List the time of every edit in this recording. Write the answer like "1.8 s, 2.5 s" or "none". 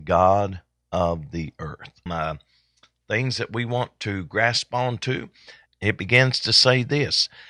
2.1 s, 5.7 s